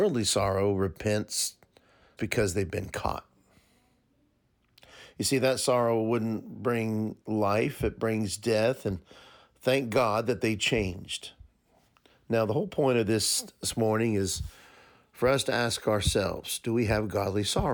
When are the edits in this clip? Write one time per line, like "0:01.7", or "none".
0:02.2